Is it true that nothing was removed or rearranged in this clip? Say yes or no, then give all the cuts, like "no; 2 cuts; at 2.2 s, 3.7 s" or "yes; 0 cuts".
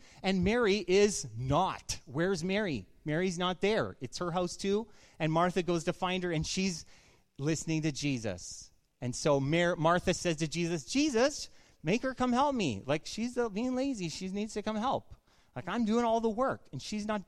yes; 0 cuts